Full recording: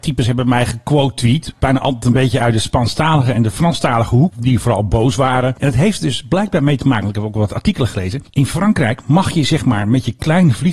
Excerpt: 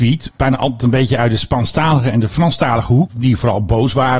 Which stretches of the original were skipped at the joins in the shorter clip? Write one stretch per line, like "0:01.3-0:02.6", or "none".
none